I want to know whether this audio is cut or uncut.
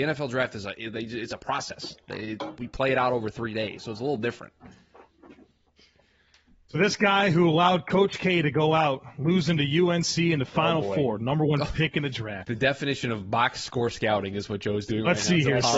uncut